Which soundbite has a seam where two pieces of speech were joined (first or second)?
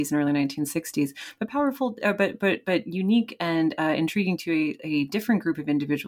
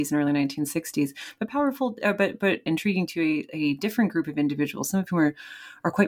second